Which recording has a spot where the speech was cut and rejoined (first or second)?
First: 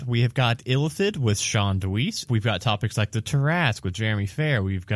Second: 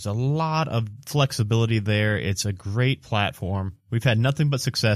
first